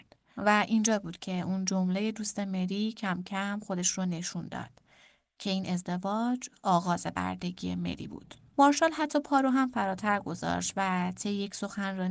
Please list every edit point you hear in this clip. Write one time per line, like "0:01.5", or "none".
none